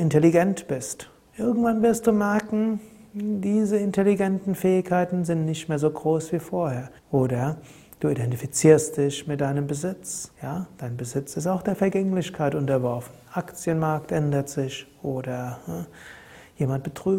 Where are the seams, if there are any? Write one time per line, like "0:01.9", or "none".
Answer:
0:07.0
0:10.3